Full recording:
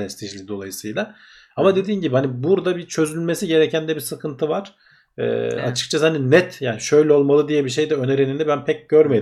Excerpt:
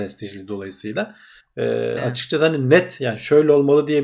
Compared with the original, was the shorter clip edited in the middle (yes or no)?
yes